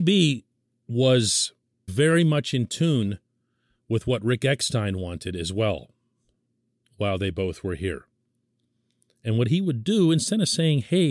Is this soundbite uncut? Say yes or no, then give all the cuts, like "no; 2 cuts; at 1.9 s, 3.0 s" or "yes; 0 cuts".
no; 1 cut; at 1.9 s